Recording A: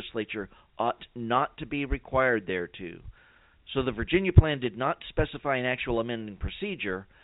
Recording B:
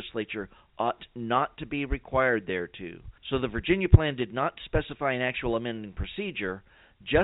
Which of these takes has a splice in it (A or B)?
B